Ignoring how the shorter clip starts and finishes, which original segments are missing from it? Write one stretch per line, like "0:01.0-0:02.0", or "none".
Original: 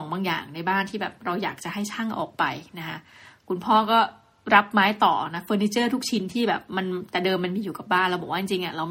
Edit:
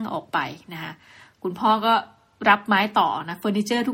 none